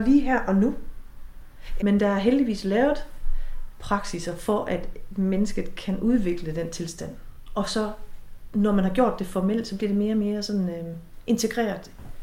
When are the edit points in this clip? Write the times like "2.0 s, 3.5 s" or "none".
1.8 s